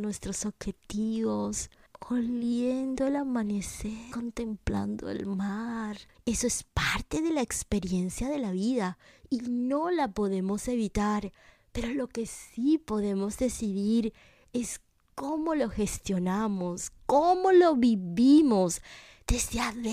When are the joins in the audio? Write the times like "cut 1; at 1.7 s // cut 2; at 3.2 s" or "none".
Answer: cut 1; at 6.1 s // cut 2; at 17.0 s